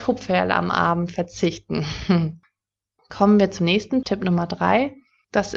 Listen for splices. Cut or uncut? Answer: cut